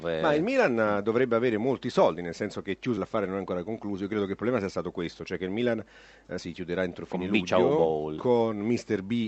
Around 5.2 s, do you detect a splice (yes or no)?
no